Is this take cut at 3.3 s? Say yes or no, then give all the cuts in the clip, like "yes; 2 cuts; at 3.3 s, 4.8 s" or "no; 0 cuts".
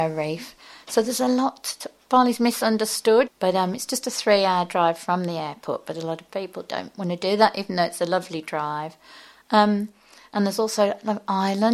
yes; 1 cut; at 3.3 s